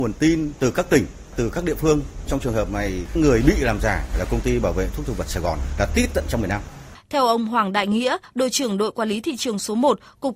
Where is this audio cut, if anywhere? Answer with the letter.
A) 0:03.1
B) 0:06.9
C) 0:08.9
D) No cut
B